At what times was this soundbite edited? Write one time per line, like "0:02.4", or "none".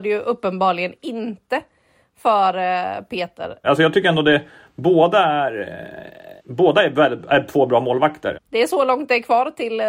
0:03.6
0:06.4
0:08.3